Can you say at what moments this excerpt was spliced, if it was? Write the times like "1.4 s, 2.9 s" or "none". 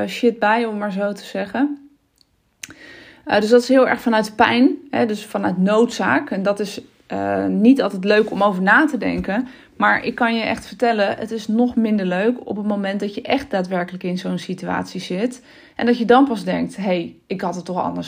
none